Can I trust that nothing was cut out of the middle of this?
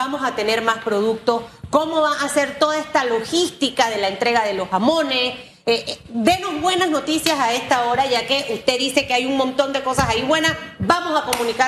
yes; 0 cuts

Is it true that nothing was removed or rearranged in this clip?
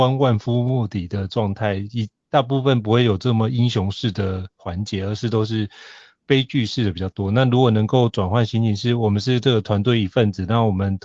yes; 0 cuts

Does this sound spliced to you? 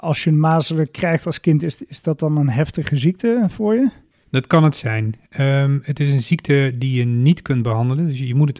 no; 0 cuts

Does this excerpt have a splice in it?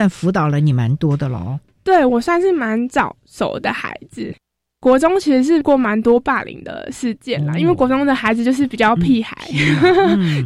no; 0 cuts

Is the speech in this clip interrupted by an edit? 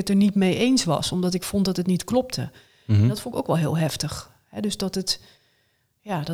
no; 0 cuts

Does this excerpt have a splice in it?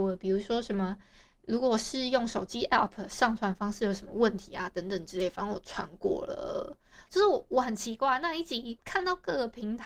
yes; 1 cut; at 7.0 s

